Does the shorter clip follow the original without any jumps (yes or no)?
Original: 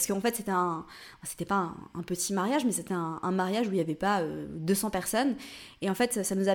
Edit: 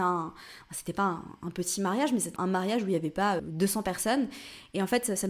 no